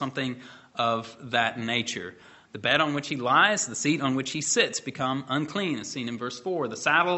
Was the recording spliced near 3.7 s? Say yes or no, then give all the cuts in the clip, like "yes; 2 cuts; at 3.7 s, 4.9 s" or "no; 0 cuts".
no; 1 cut; at 2.4 s